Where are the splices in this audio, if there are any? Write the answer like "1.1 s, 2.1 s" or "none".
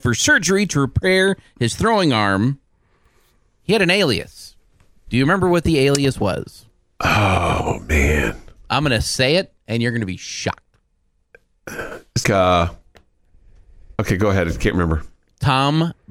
12.2 s, 14.0 s

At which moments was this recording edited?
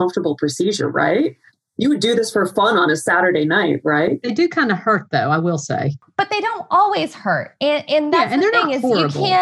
none

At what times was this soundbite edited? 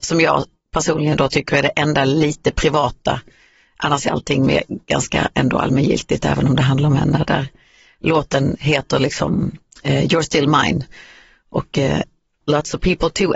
12.4 s

